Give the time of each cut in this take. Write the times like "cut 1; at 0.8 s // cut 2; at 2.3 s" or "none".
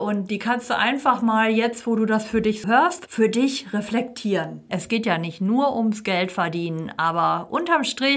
cut 1; at 2.6 s // cut 2; at 4.7 s